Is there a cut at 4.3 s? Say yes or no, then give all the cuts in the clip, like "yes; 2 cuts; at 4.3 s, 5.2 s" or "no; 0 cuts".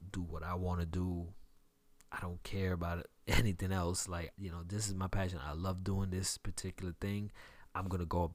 yes; 1 cut; at 4.3 s